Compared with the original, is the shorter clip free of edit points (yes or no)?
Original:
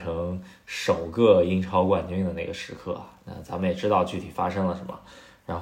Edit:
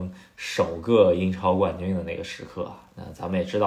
yes